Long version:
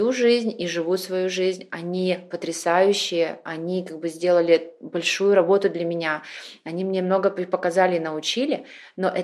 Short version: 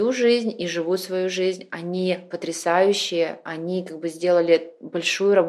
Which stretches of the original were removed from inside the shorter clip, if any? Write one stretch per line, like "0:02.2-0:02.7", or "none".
none